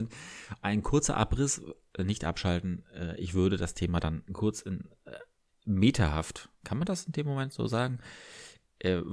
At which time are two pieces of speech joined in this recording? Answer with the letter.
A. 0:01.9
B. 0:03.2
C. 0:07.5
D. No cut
A